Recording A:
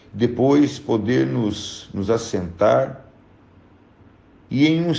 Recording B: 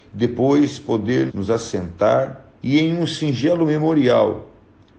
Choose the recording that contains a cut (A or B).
B